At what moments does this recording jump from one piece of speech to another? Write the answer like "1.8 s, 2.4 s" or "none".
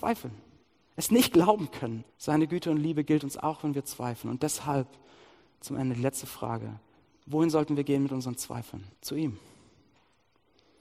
2.1 s, 8.9 s